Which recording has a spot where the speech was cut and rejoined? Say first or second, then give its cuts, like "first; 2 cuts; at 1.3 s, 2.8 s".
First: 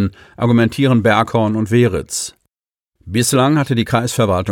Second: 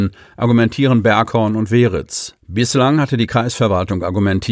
second; 1 cut; at 2.4 s